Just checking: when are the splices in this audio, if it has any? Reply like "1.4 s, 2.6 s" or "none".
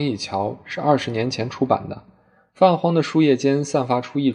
none